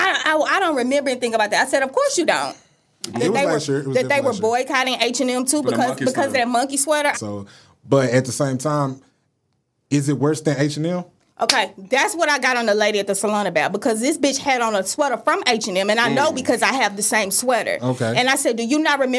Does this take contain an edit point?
yes; 2 cuts; at 3.1 s, 7.1 s

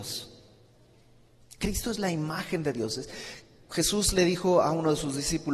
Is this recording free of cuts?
yes; 0 cuts

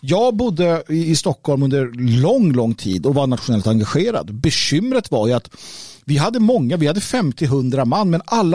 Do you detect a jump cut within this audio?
no; 0 cuts

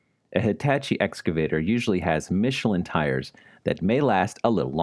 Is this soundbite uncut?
yes; 0 cuts

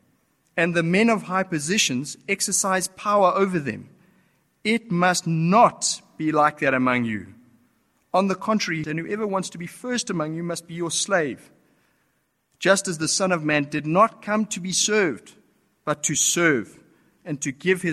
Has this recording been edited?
yes; 1 cut; at 8.8 s

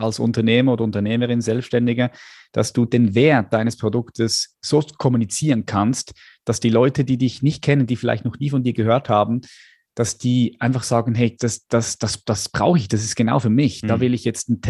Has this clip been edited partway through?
yes; 1 cut; at 11.4 s

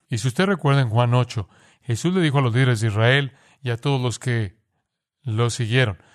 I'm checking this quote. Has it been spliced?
no; 0 cuts

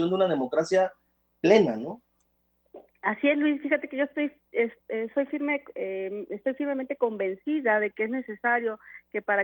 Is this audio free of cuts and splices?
yes; 0 cuts

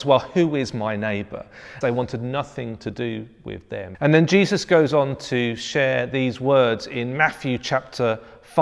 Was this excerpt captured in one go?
no; 2 cuts; at 1.8 s, 3.9 s

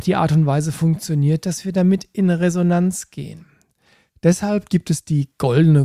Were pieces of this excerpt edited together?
no; 0 cuts

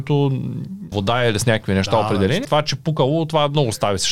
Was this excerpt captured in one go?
no; 2 cuts; at 0.9 s, 2.4 s

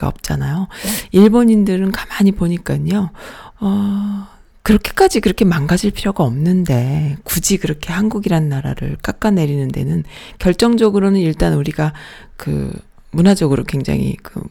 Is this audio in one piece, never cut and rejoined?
no; 1 cut; at 3.5 s

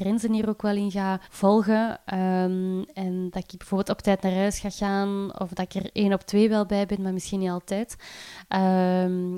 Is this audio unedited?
no; 1 cut; at 1.2 s

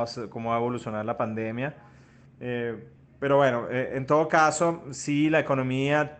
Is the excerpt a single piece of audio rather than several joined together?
no; 1 cut; at 2.2 s

